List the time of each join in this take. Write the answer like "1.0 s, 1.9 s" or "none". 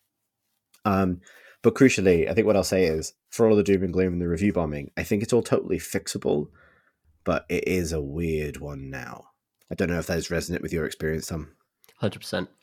7.0 s